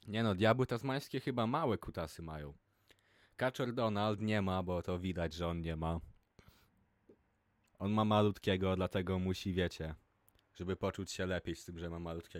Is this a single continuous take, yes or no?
no